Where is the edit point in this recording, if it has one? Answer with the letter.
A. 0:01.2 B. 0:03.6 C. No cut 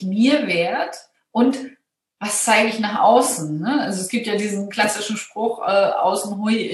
C